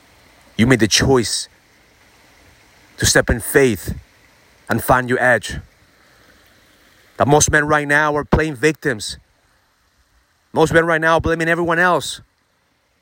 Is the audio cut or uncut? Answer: uncut